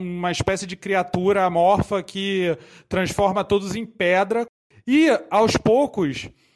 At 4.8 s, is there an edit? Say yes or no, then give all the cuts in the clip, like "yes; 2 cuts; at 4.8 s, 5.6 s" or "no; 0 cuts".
no; 0 cuts